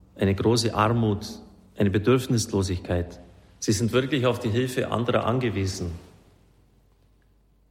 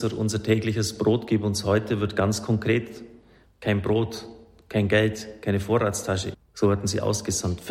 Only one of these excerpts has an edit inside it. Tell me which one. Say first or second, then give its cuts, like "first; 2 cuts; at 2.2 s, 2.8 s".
second; 2 cuts; at 3.4 s, 6.3 s